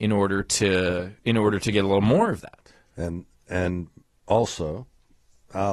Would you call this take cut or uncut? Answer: cut